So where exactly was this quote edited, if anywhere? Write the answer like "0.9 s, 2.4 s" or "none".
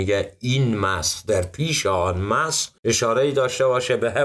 2.8 s